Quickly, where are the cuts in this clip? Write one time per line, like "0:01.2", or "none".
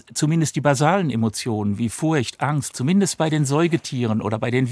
0:02.7